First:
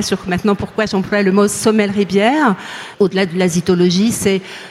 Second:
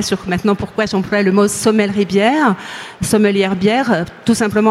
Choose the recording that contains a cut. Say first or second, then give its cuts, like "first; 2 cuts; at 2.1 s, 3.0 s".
first; 1 cut; at 2.9 s